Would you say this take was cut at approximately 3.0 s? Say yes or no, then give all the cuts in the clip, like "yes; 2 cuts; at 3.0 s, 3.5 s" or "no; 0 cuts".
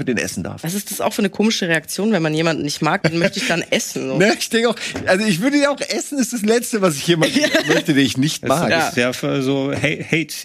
yes; 1 cut; at 3.0 s